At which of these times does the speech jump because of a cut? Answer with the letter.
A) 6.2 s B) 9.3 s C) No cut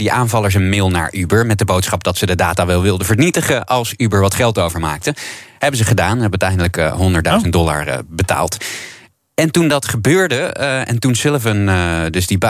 C